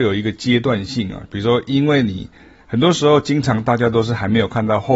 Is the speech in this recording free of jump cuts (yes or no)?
no